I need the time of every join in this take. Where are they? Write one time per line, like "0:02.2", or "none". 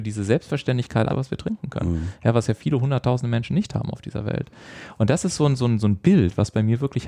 0:01.1